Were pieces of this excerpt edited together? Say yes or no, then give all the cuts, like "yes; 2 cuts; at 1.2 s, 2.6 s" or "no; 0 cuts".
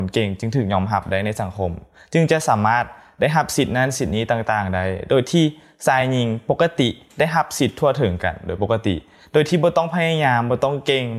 no; 0 cuts